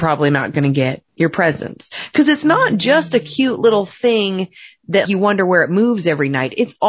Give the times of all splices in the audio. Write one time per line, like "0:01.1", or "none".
none